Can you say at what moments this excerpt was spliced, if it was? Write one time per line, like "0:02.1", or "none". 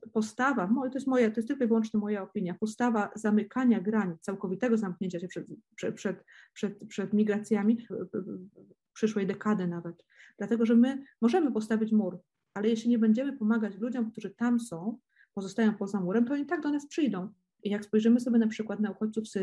0:07.9
0:17.6